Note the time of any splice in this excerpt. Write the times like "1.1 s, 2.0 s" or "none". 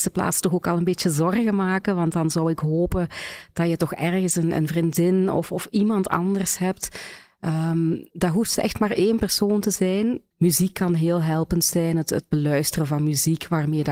10.3 s